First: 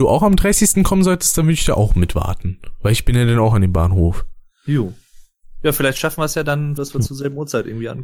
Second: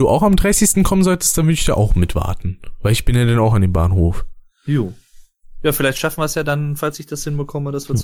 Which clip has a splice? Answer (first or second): first